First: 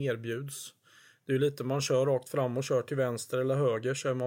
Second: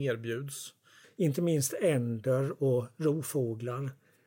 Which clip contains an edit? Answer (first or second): second